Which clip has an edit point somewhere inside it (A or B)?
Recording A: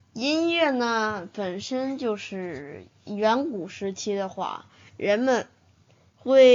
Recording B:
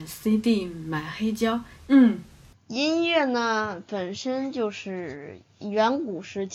B